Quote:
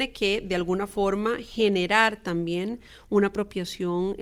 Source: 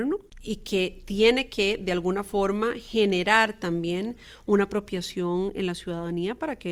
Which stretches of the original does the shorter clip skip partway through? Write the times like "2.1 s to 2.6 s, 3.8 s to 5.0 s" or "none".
none